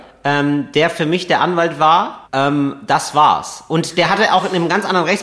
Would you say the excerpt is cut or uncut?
cut